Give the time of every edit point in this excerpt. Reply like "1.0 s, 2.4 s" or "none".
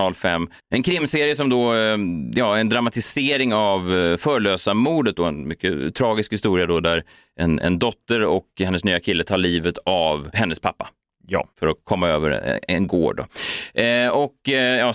11.5 s